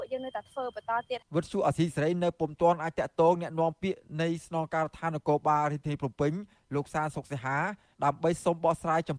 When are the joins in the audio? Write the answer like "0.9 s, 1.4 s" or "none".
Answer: 1.2 s